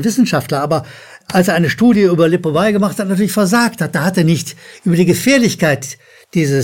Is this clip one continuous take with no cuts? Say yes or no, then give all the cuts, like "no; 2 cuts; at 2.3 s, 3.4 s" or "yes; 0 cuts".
no; 1 cut; at 1.2 s